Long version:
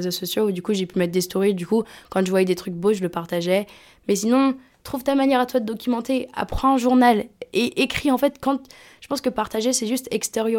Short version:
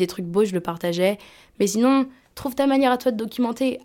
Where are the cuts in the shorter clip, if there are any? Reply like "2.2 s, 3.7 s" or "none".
none